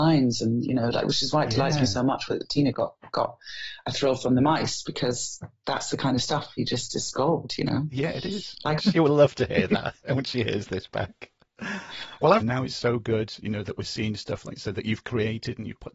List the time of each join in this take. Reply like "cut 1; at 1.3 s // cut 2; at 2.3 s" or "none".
cut 1; at 8.8 s // cut 2; at 12.4 s